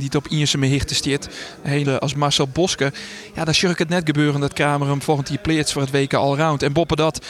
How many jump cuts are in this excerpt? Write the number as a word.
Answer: one